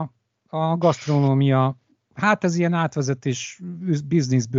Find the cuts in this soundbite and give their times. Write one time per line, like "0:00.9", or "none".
none